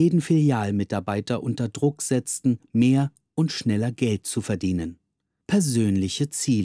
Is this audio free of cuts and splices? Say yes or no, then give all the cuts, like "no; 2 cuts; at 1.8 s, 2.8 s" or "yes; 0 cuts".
yes; 0 cuts